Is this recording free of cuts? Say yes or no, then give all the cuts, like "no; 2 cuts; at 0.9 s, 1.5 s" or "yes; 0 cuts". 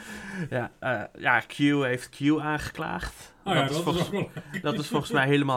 yes; 0 cuts